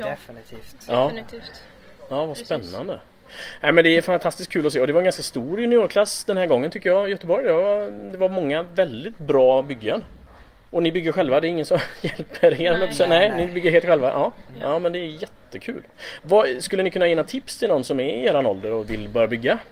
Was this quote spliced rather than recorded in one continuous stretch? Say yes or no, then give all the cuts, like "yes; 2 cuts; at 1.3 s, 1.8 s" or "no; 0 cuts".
no; 0 cuts